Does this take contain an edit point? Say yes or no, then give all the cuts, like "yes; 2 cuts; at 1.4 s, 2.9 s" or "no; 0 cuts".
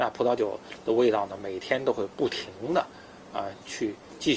no; 0 cuts